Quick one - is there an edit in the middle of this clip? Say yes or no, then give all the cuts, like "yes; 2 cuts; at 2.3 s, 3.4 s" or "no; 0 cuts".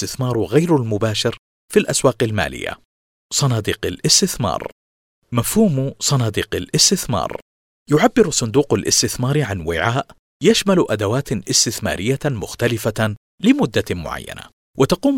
no; 0 cuts